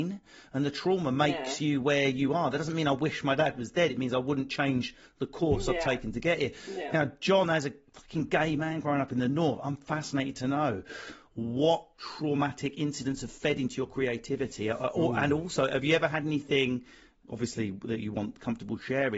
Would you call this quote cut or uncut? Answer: uncut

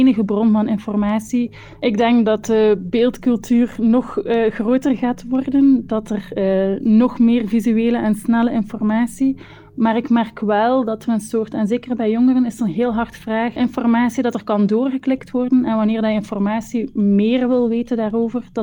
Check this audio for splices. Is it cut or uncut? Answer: cut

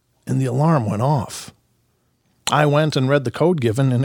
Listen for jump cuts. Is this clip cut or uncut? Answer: uncut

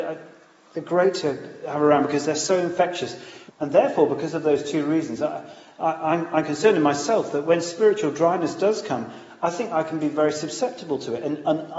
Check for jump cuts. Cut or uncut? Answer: cut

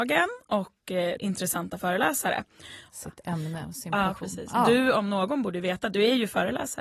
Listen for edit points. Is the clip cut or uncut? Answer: cut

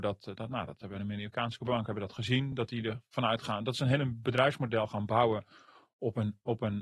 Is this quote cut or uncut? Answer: uncut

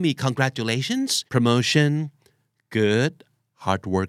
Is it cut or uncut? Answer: cut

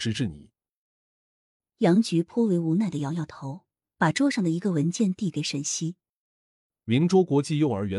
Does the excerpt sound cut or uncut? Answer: uncut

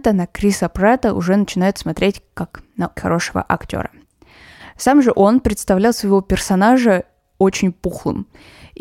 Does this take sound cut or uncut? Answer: cut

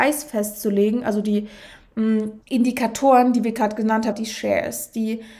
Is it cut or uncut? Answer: cut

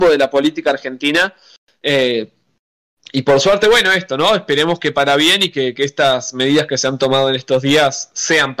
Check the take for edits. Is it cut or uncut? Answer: uncut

